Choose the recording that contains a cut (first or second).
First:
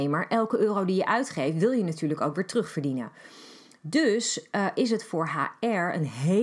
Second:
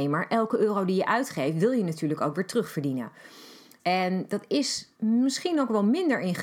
second